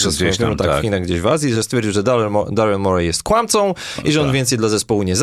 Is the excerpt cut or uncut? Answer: uncut